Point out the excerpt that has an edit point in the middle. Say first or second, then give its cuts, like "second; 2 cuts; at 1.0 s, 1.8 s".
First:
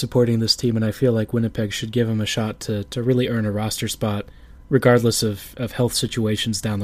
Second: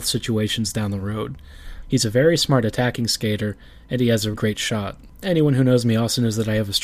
second; 2 cuts; at 1.8 s, 4.3 s